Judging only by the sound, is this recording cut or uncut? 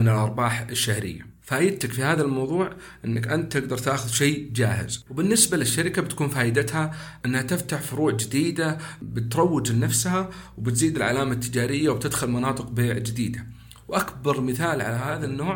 cut